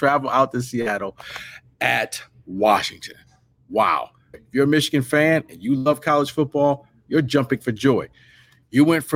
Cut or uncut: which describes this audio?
cut